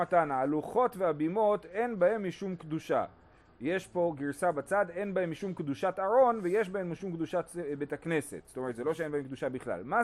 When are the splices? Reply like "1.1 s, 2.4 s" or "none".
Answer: none